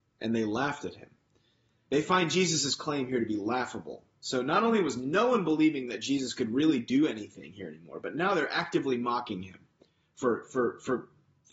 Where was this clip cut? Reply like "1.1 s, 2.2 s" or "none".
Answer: 1.9 s